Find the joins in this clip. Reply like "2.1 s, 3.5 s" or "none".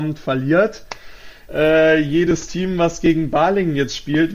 1.5 s